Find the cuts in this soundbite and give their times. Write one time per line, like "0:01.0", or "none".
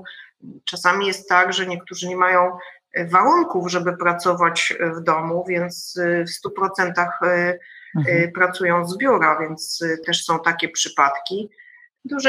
0:10.0